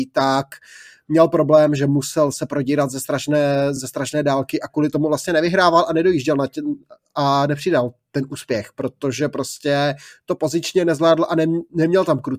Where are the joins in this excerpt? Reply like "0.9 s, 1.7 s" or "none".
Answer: none